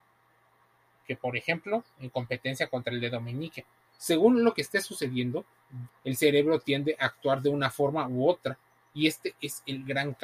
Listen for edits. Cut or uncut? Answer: cut